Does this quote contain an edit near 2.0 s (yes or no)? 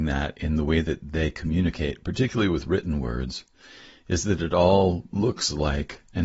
no